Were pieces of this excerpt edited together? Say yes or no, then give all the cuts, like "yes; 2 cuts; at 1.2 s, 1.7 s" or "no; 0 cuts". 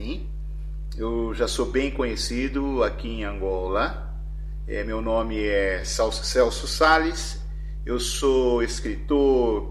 no; 0 cuts